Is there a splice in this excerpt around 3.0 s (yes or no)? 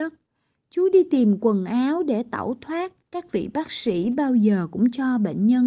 yes